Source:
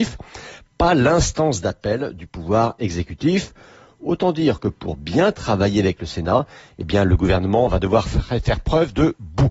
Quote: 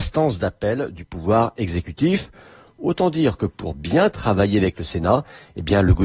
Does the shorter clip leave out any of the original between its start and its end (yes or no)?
no